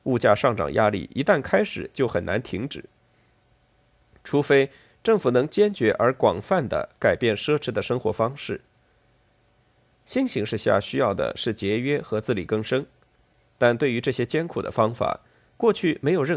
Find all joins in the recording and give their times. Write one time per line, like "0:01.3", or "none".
none